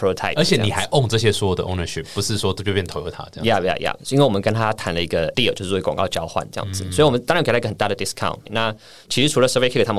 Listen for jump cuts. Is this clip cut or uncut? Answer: cut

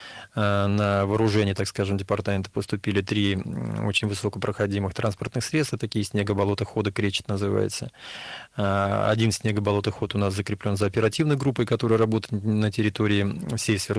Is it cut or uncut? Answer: uncut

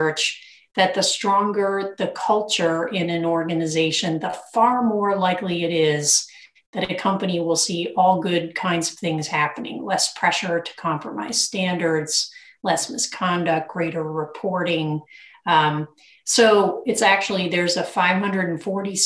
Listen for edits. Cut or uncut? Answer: uncut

